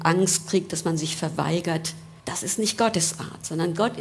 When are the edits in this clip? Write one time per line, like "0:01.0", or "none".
0:02.2